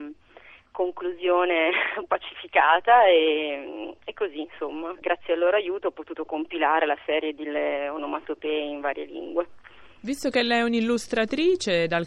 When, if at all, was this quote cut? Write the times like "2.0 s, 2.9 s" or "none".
none